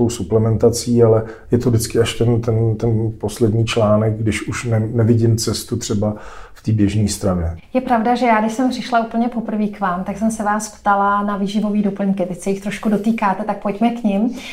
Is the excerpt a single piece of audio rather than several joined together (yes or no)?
no